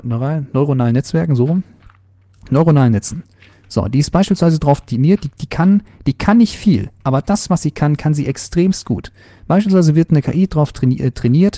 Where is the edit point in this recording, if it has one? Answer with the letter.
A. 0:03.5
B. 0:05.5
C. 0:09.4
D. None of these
D